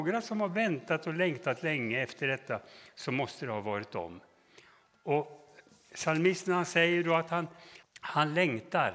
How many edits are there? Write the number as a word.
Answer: one